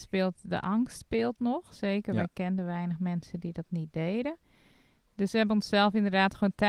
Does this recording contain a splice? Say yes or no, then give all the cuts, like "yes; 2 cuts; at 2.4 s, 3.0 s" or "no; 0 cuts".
no; 0 cuts